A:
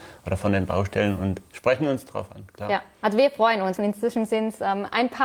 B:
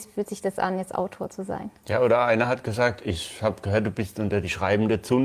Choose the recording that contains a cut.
A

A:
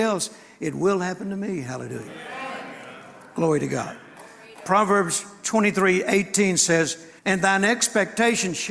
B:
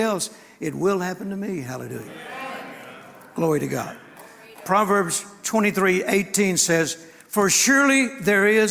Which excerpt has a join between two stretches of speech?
A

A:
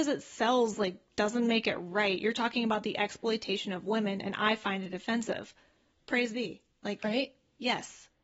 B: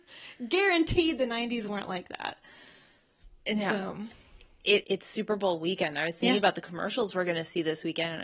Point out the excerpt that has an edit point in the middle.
B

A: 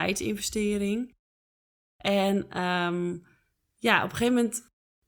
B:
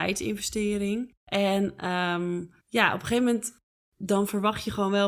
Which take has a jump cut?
B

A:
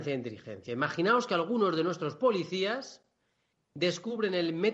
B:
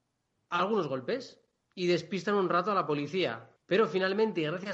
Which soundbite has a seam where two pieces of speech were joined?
B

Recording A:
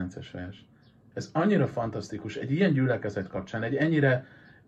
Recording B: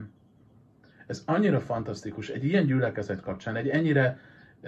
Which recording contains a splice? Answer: A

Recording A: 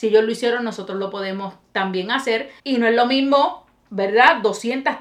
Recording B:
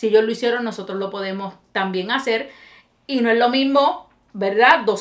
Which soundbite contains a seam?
A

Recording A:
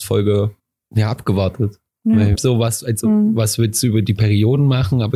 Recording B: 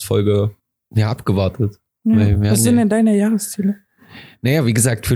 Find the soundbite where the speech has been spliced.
A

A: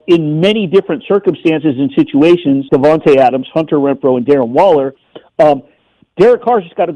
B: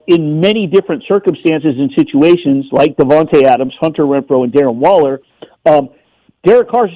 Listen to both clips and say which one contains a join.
A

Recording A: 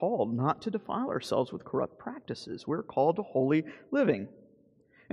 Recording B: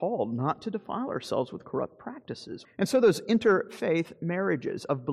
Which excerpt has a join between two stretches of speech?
B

